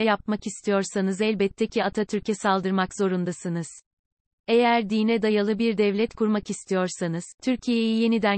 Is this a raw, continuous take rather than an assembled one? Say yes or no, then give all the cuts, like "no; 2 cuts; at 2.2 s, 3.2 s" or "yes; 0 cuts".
yes; 0 cuts